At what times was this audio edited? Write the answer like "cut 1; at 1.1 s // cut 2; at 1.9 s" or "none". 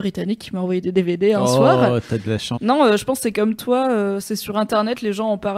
cut 1; at 2.6 s